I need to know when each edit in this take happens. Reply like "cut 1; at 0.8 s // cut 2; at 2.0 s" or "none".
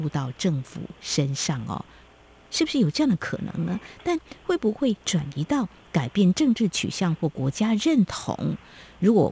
none